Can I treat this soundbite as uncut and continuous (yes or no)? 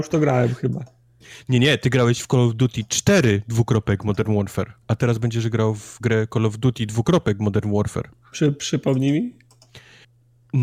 no